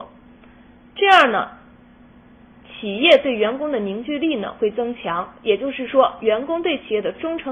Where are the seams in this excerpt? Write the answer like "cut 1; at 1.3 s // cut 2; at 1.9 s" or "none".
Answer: none